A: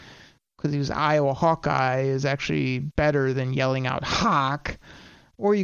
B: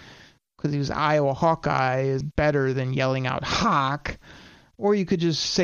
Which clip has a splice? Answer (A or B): B